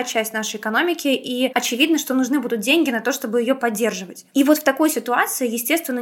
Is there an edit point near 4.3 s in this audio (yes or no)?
no